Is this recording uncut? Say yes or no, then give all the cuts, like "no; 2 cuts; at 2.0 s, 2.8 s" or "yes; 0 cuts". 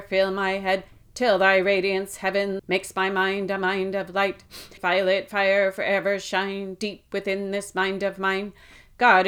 no; 2 cuts; at 2.6 s, 4.8 s